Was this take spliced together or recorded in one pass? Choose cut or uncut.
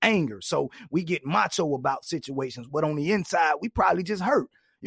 cut